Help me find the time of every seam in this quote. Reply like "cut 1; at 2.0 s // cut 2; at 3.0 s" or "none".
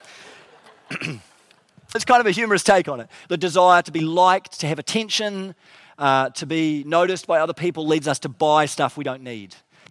cut 1; at 1.9 s // cut 2; at 3.2 s